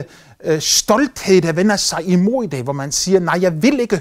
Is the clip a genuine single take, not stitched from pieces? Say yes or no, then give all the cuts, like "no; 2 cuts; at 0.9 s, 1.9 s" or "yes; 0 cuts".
yes; 0 cuts